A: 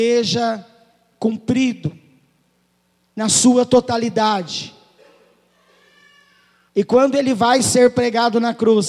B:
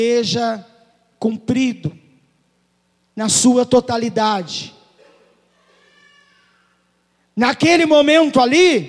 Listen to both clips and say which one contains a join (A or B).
A